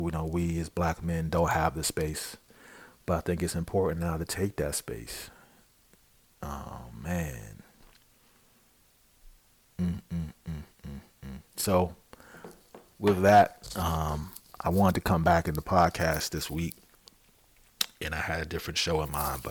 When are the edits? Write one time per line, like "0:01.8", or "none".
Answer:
none

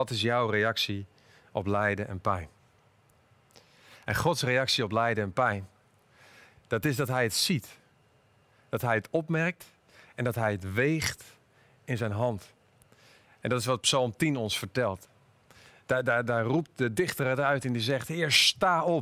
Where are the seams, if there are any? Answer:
none

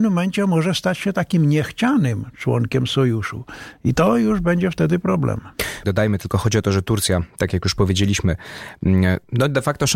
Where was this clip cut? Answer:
0:05.8

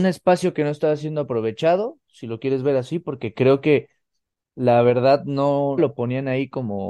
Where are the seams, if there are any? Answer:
0:05.8

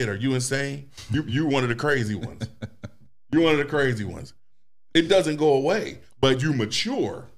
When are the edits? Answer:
none

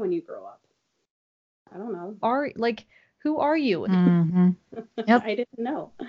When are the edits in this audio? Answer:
0:02.2
0:03.8

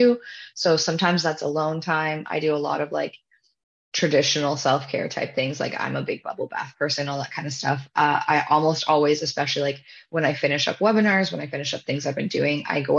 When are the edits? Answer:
none

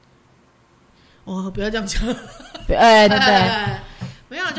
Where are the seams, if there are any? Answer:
0:03.1

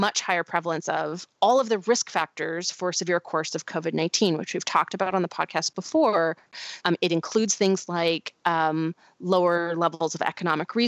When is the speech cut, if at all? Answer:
0:06.8

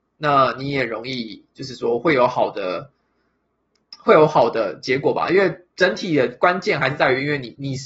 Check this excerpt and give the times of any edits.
none

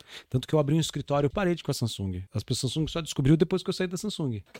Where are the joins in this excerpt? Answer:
0:01.3

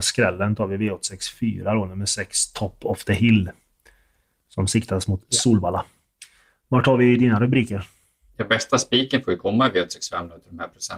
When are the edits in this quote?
none

